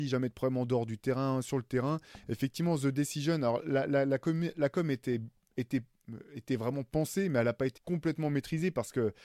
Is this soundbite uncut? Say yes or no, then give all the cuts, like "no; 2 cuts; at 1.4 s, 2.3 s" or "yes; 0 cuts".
no; 1 cut; at 7.8 s